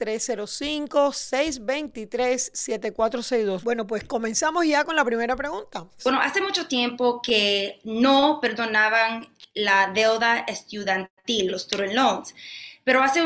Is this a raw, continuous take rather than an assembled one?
no; 3 cuts; at 3.6 s, 6.0 s, 11.5 s

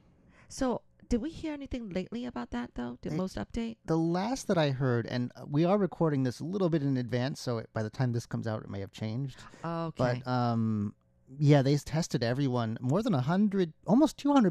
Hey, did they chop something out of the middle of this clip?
no; 0 cuts

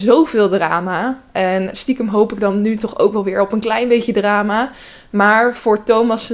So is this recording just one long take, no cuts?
yes; 0 cuts

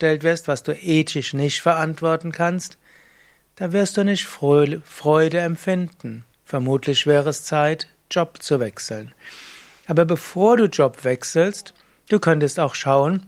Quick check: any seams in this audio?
no; 0 cuts

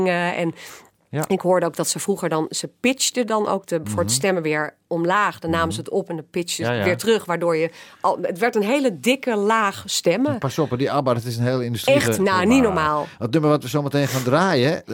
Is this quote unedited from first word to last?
yes; 0 cuts

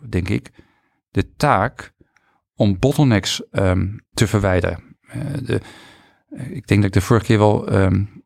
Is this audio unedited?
no; 1 cut; at 4.1 s

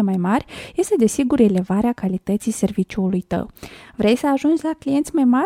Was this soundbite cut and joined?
no; 0 cuts

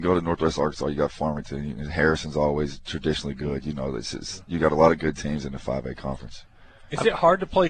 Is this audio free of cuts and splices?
yes; 0 cuts

